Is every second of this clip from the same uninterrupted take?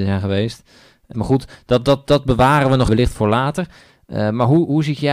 no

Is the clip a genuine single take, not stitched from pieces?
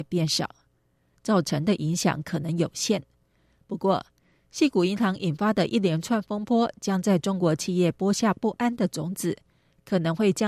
no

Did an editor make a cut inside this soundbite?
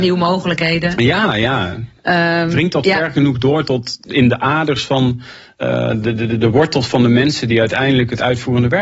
no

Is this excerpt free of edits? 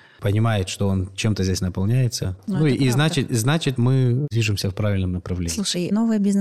yes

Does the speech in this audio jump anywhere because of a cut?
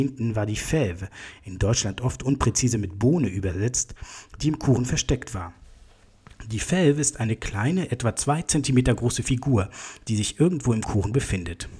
no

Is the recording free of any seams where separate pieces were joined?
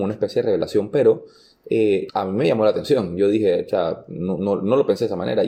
no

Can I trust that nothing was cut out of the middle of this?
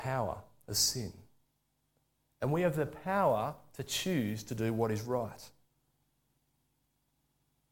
yes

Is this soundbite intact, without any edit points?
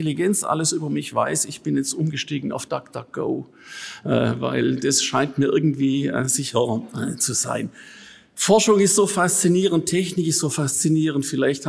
yes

